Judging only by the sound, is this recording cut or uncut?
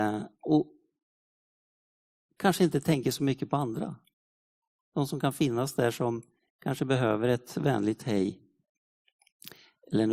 uncut